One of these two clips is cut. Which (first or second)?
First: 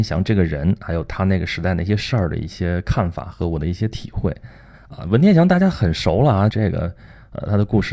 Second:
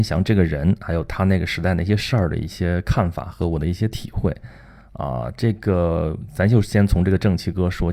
first